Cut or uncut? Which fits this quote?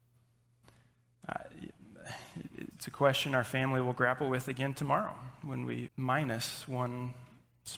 cut